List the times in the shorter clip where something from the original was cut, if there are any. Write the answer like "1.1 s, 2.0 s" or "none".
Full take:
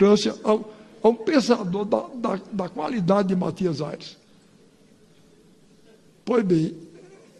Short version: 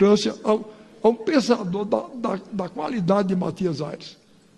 none